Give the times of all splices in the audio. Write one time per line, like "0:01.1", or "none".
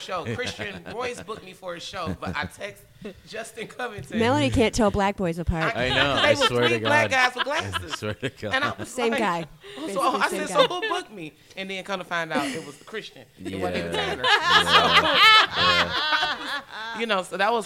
none